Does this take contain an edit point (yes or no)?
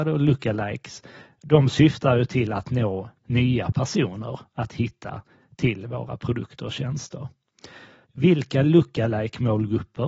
yes